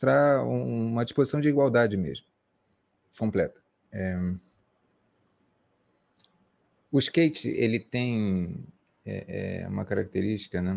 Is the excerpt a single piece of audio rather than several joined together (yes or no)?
no